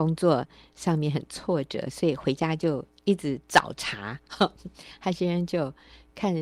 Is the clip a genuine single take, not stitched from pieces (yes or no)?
yes